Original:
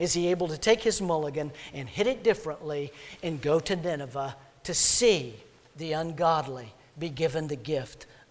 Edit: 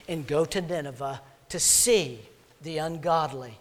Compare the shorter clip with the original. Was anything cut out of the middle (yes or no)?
no